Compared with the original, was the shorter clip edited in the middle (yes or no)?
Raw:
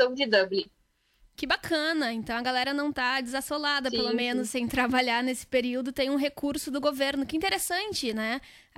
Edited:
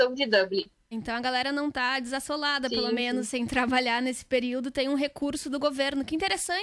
yes